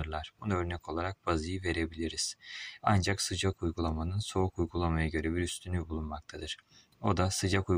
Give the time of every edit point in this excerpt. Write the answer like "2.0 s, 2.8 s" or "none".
2.8 s